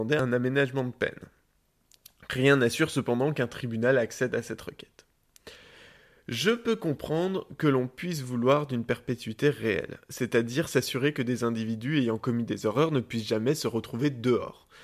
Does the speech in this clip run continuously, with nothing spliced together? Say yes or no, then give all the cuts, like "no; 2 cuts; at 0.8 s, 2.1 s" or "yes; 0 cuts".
yes; 0 cuts